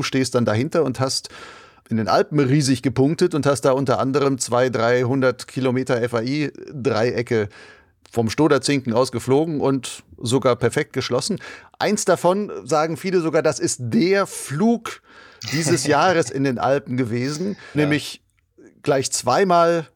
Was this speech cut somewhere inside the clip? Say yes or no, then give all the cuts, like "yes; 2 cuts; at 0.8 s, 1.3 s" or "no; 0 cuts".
yes; 1 cut; at 17.7 s